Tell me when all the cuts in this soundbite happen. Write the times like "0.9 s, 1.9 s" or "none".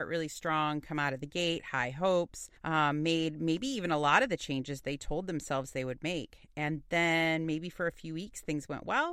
2.6 s

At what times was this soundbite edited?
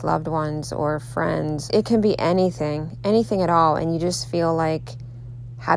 1.7 s

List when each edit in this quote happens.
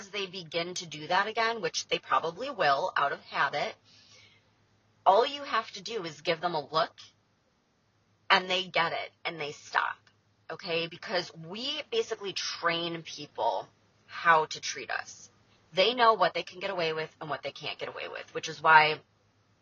none

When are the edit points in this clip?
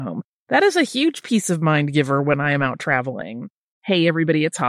3.7 s

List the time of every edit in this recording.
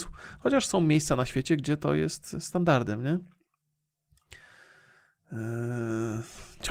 none

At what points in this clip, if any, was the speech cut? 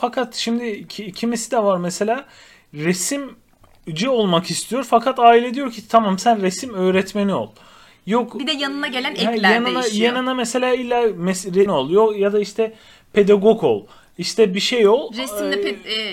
11.7 s

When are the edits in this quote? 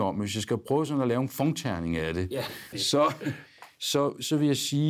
2.7 s

